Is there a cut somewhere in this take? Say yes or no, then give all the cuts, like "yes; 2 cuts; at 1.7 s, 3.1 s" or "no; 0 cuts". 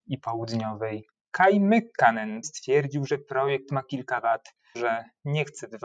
yes; 2 cuts; at 2.4 s, 4.7 s